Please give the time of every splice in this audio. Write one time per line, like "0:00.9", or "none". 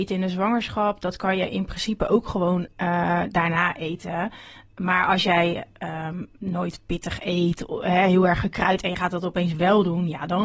none

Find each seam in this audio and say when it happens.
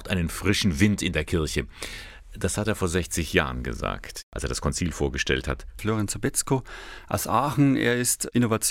0:05.8

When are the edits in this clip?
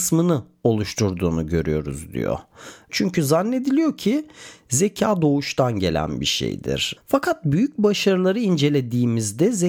0:02.9
0:07.0

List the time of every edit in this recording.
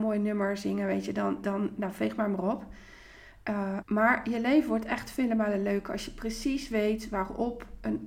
0:03.8

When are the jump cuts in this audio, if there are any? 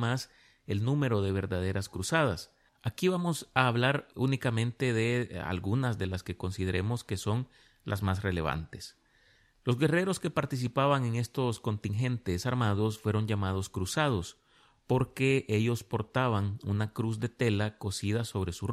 0:04.1

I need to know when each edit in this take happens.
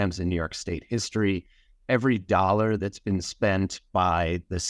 0:01.7

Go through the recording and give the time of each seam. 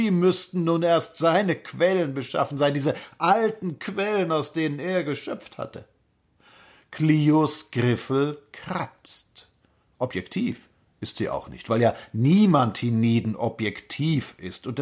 none

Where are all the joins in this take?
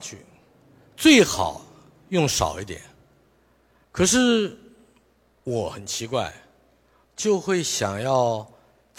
0:03.8
0:07.0

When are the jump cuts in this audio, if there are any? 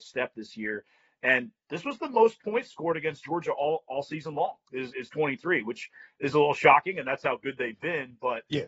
none

